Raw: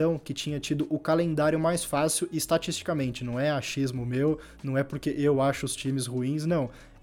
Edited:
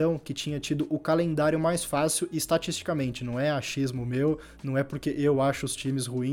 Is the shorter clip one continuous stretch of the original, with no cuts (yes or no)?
yes